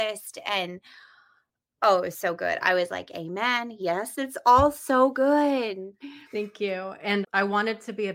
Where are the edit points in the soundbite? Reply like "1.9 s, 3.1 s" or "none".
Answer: 4.1 s, 7.2 s